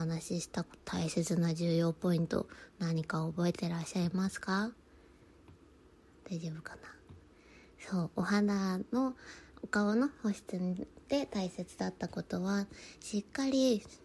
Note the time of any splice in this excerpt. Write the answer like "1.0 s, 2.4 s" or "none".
none

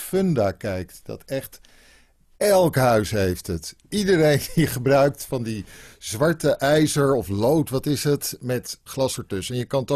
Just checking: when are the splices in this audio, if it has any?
none

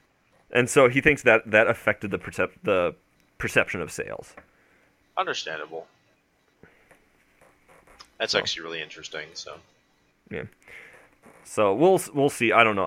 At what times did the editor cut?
none

